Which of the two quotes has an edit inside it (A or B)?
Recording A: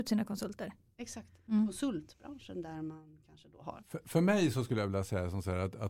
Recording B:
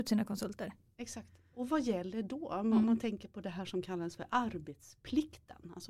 A